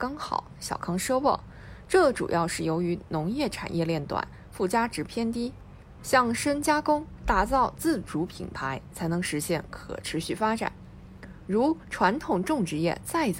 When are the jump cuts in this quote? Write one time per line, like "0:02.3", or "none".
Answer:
0:06.0
0:07.2